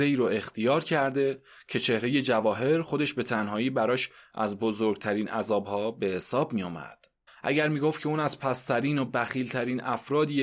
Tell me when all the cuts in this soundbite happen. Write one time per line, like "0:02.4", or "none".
0:07.3